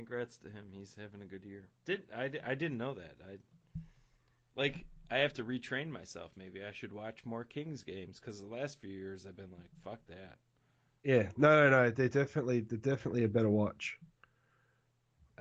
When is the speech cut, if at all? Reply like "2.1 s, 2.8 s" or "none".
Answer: 1.8 s